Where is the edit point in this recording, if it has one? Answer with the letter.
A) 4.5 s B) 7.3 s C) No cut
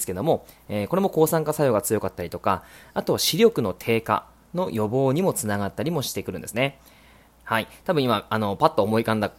B